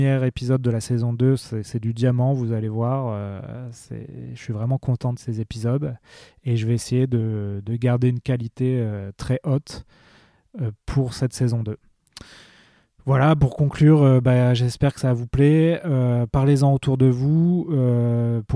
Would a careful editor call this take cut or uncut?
cut